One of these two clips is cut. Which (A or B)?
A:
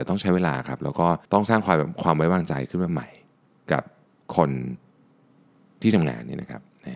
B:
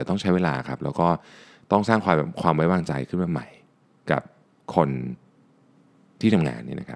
A